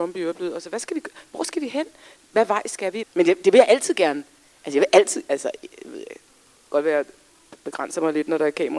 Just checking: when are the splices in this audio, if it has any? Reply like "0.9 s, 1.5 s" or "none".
3.0 s